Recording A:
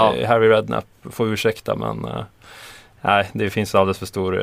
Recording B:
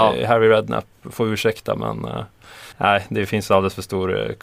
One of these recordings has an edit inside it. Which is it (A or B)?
B